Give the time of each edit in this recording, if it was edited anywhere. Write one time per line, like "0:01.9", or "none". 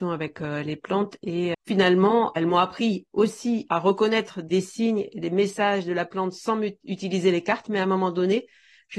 0:01.5